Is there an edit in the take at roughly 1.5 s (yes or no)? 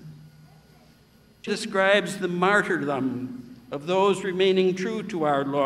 yes